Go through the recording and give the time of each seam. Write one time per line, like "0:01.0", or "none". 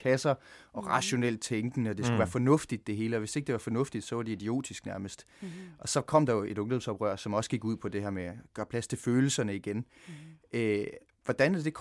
none